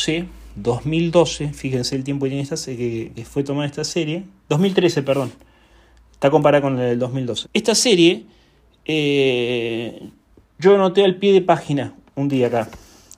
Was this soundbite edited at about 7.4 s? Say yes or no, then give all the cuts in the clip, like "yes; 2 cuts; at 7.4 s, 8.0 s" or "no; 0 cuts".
yes; 2 cuts; at 3.1 s, 7.4 s